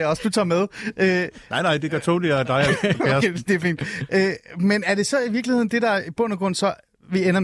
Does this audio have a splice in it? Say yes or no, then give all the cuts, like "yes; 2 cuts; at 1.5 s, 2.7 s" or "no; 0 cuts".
no; 0 cuts